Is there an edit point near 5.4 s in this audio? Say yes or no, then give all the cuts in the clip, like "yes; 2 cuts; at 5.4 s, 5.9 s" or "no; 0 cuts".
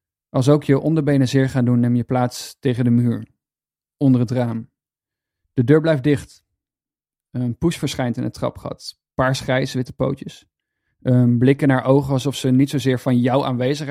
yes; 1 cut; at 5.4 s